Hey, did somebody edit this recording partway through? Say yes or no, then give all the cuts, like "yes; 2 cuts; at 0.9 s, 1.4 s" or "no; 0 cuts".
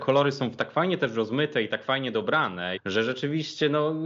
yes; 1 cut; at 2.8 s